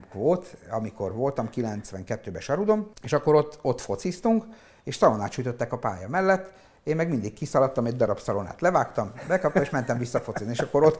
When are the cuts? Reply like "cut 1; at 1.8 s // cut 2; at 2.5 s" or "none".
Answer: cut 1; at 2.9 s